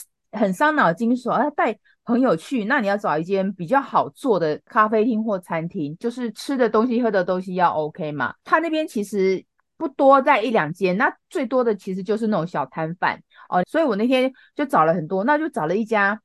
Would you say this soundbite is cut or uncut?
cut